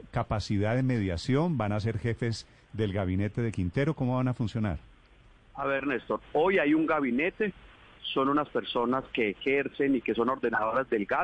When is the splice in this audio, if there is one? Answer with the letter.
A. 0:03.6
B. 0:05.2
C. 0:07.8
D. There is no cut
D